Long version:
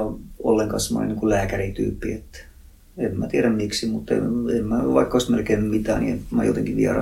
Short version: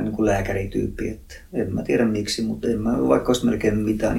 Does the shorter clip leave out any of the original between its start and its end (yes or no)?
yes